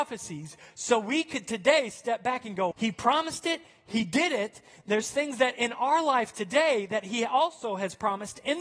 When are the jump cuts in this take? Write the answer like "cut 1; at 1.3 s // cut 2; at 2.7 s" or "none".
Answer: cut 1; at 2.7 s